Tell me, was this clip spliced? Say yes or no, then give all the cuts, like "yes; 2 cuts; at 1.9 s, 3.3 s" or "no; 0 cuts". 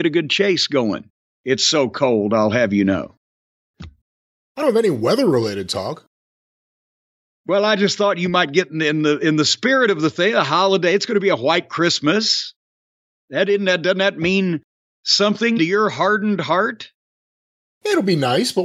yes; 2 cuts; at 4.4 s, 15.6 s